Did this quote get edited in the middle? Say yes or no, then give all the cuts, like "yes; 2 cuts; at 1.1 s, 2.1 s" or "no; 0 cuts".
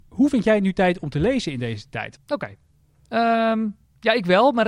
yes; 1 cut; at 2.2 s